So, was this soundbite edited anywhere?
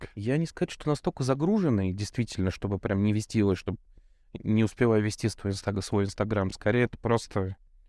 no; 0 cuts

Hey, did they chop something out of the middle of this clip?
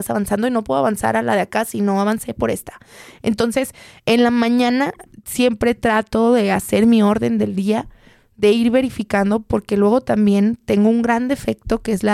no; 0 cuts

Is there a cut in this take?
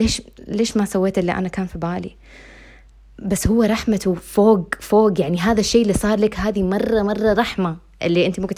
no; 0 cuts

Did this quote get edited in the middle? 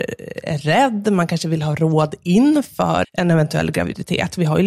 yes; 1 cut; at 3.0 s

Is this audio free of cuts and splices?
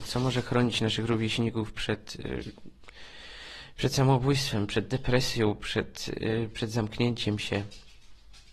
yes; 0 cuts

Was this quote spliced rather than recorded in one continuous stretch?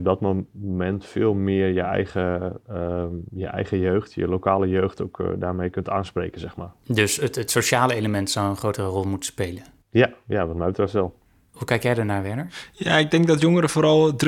no; 0 cuts

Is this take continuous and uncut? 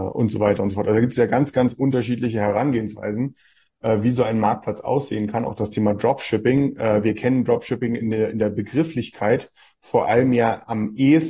yes; 0 cuts

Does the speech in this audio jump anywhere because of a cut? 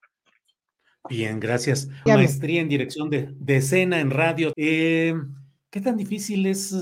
yes; 2 cuts; at 2.1 s, 4.5 s

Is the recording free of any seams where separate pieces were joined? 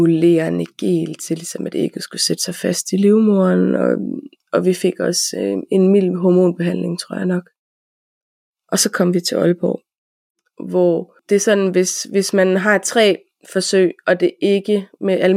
yes; 0 cuts

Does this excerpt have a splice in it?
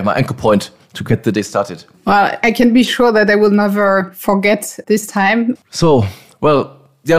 yes; 2 cuts; at 1.9 s, 5.6 s

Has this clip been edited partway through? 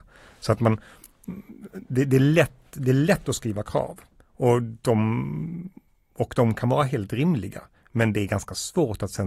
no; 0 cuts

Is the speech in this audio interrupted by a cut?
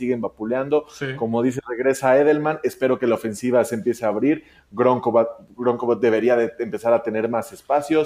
no; 0 cuts

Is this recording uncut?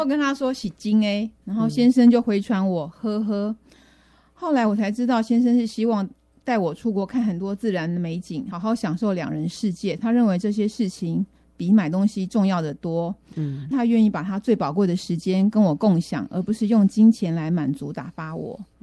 no; 2 cuts; at 8.5 s, 13.7 s

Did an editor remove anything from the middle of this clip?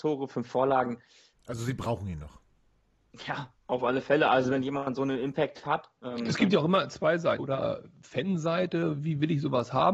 yes; 3 cuts; at 1.3 s, 6.0 s, 7.4 s

